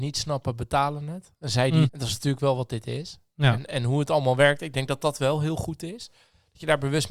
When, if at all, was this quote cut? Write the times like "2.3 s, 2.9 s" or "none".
1.9 s